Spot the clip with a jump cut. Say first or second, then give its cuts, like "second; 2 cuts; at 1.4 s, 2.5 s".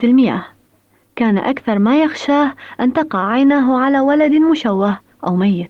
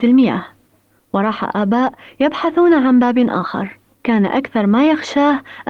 second; 2 cuts; at 0.9 s, 3.9 s